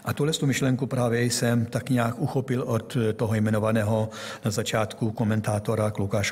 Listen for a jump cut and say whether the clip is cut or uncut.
uncut